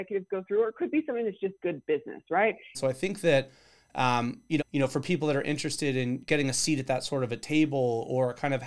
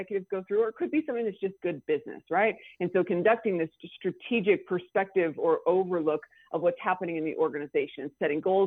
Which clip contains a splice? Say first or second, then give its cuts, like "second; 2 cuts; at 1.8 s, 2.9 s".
first; 3 cuts; at 2.7 s, 4.6 s, 6.2 s